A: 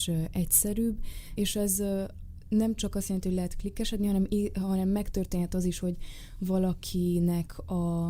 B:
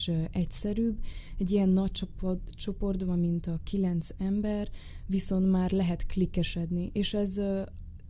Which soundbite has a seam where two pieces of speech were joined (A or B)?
A